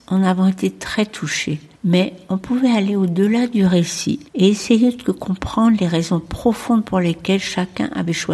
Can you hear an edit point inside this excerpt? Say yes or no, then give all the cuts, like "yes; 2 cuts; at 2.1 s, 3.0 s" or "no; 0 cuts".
yes; 2 cuts; at 1.7 s, 4.3 s